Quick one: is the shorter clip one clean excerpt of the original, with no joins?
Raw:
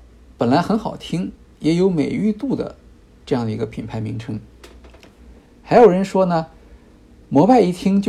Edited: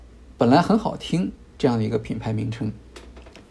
no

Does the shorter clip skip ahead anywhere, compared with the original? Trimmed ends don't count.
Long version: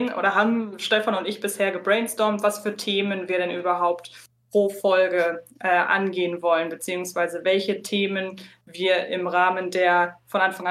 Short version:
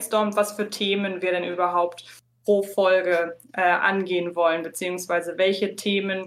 no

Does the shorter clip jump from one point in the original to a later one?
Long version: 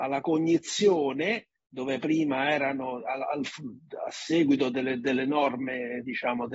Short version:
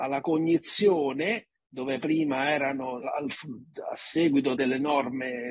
yes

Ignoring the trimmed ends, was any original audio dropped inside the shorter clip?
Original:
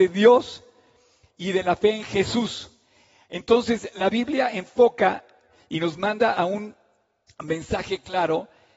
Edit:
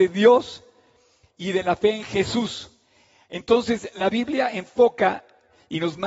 no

